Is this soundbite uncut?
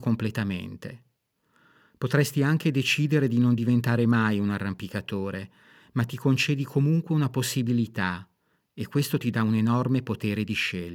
yes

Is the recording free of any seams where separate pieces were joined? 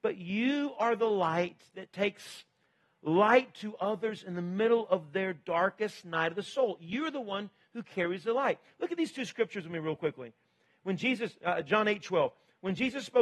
yes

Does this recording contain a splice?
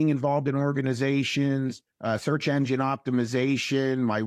no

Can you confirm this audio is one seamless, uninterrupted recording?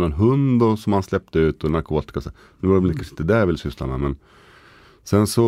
yes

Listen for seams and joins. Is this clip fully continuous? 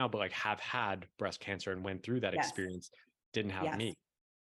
yes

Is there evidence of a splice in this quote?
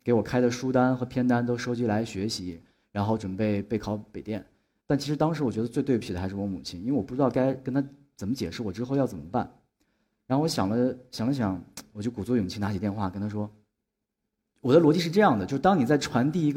yes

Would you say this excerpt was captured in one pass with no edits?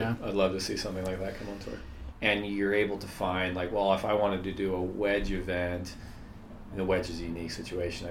no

